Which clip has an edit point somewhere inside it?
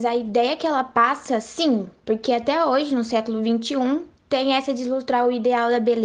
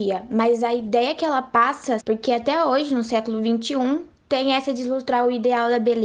second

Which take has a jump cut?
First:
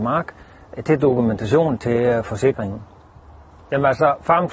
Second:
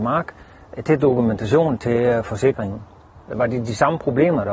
second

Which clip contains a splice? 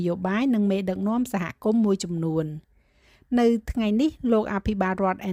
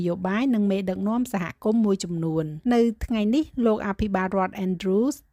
second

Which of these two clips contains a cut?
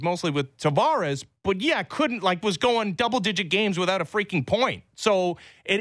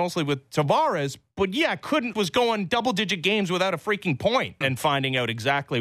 second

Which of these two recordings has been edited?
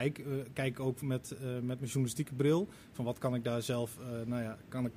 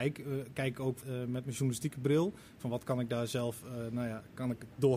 second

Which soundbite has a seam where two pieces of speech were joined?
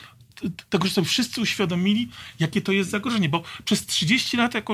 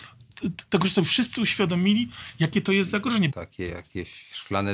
second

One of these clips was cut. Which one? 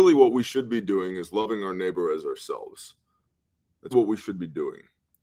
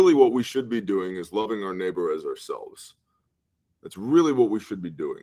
first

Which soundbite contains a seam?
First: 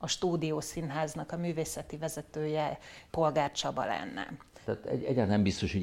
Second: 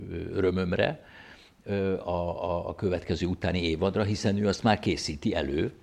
first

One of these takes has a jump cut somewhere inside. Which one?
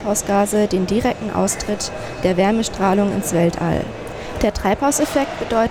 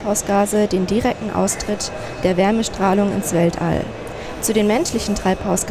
first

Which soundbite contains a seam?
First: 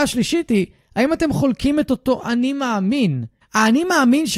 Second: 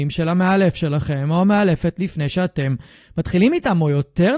first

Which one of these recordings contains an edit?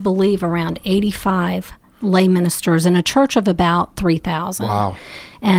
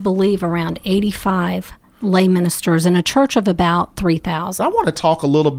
second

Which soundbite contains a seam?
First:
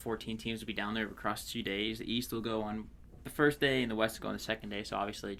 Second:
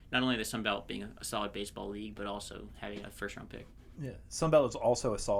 second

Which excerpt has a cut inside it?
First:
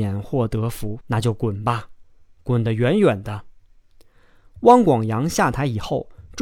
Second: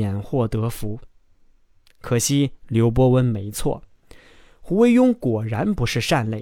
first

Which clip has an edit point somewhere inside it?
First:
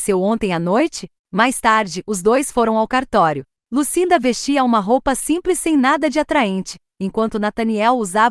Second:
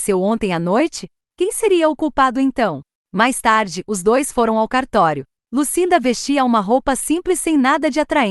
first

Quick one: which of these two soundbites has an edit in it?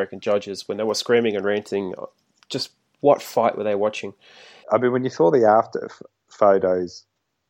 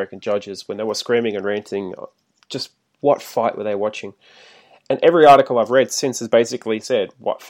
first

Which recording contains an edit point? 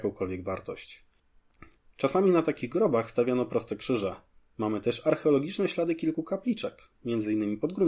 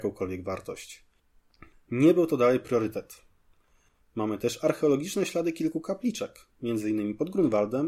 second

